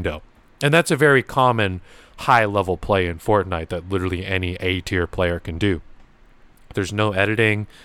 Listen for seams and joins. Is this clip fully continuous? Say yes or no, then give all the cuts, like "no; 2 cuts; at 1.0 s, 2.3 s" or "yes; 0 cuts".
no; 1 cut; at 6.7 s